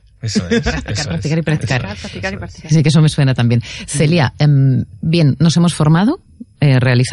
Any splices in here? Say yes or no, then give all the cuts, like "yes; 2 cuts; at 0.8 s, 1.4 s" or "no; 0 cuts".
no; 0 cuts